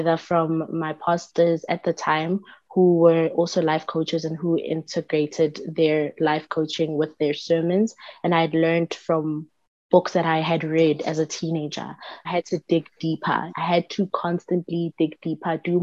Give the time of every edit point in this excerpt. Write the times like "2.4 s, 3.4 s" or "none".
12.2 s, 13.5 s